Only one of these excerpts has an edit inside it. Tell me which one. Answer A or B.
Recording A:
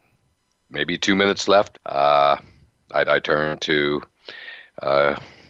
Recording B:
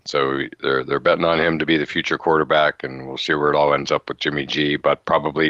A